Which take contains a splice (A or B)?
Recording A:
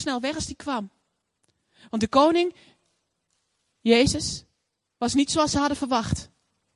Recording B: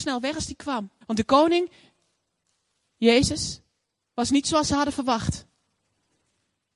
B